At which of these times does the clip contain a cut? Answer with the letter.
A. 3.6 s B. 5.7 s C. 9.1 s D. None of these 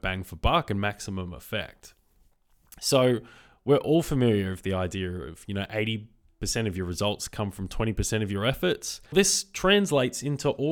C